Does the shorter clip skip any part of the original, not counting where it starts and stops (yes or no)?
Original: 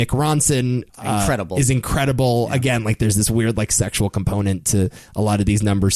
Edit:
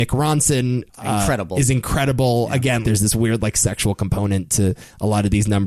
yes